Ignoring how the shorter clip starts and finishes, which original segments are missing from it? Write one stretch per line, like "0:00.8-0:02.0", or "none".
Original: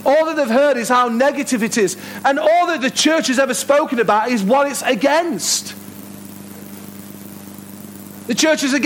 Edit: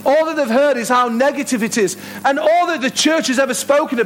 none